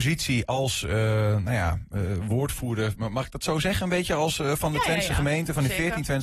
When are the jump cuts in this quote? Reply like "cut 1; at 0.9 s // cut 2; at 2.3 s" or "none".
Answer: none